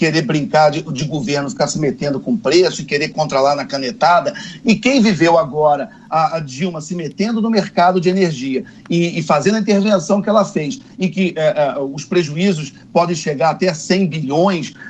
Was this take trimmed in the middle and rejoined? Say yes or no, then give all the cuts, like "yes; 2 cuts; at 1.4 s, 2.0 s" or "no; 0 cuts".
yes; 2 cuts; at 4.6 s, 10.9 s